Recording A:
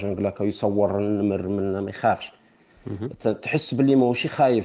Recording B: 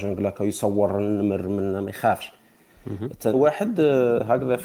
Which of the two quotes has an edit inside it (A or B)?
B